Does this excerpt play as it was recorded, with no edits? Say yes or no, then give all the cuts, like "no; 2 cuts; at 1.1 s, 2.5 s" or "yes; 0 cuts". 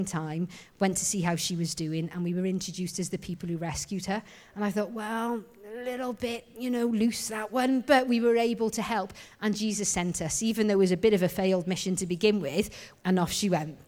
no; 1 cut; at 13.0 s